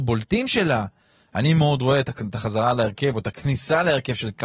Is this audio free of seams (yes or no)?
yes